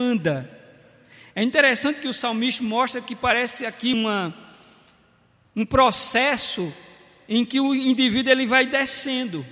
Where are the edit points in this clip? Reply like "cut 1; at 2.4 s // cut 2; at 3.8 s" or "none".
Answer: cut 1; at 3.9 s